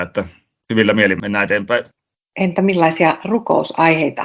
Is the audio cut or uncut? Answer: uncut